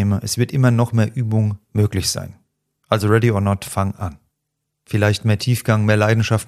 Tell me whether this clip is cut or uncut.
cut